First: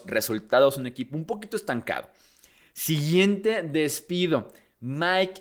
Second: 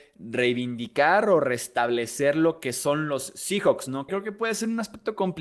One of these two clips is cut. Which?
second; 1 cut; at 4.1 s

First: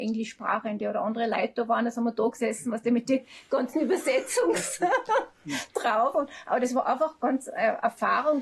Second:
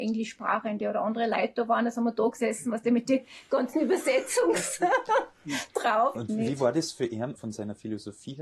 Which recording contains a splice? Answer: second; 2 cuts; at 6.1 s, 7.4 s

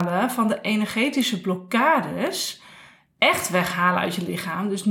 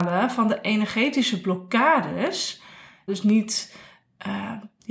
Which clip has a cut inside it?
second; 1 cut; at 3.1 s

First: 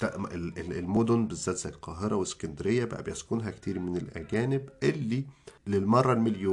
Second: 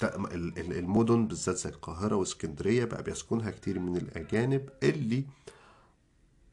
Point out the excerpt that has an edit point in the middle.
first; 1 cut; at 5.6 s

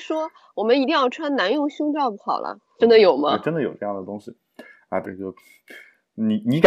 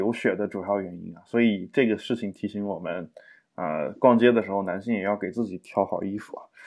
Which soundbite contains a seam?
first; 2 cuts; at 2.8 s, 5.0 s

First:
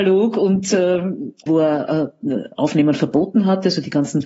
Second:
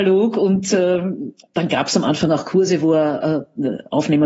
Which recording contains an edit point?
first; 1 cut; at 1.5 s

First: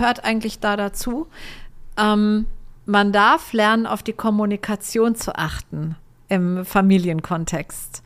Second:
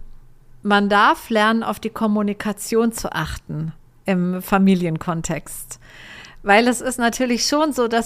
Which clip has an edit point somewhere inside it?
first; 1 cut; at 2.8 s

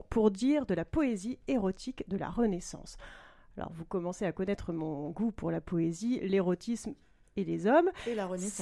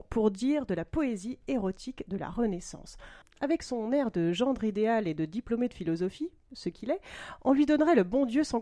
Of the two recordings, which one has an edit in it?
second; 1 cut; at 3.2 s

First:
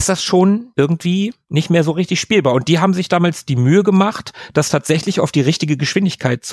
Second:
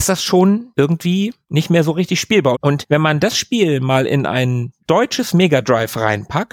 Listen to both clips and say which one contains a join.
second; 2 cuts; at 2.5 s, 4.8 s

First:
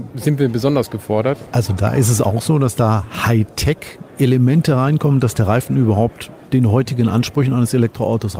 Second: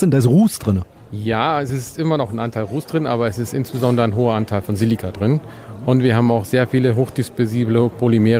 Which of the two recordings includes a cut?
first; 1 cut; at 1.5 s

